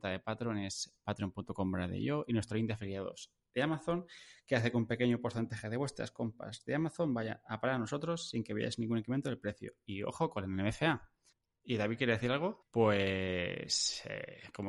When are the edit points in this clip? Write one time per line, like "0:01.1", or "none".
0:12.6